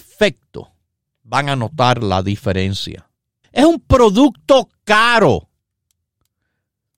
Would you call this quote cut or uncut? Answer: cut